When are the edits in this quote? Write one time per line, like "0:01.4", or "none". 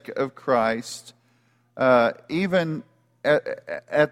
none